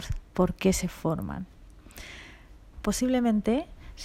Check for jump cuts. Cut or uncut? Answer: cut